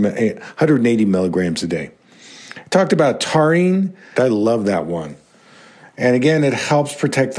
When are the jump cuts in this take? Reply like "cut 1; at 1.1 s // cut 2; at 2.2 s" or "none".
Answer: cut 1; at 4.1 s

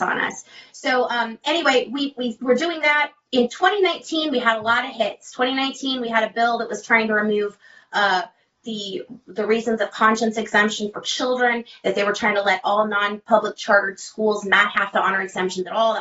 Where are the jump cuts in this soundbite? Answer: none

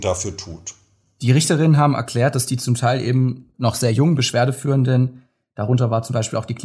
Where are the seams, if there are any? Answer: cut 1; at 3.5 s

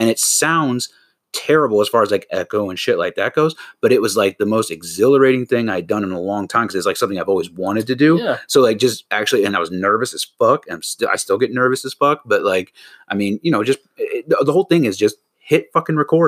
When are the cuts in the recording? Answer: none

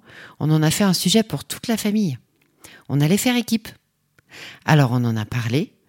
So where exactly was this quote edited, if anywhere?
none

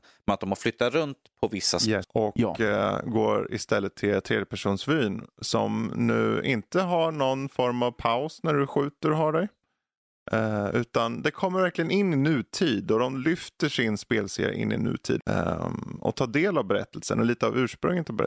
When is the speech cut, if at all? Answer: cut 1; at 2.0 s // cut 2; at 15.2 s

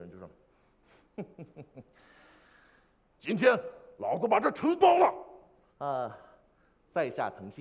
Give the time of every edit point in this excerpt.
cut 1; at 3.2 s // cut 2; at 5.7 s

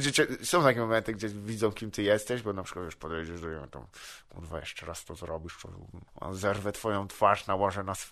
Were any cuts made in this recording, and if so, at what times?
cut 1; at 6.1 s

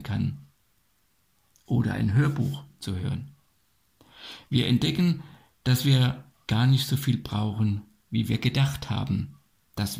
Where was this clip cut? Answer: none

